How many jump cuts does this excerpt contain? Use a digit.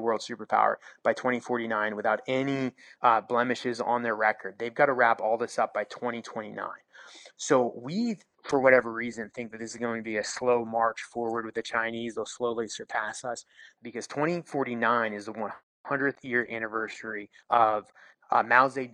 1